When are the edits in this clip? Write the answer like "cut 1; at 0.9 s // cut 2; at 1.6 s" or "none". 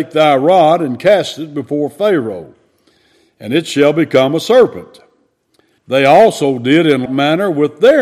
cut 1; at 5.8 s // cut 2; at 7.1 s